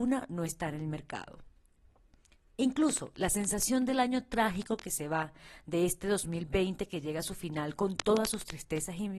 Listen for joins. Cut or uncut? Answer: uncut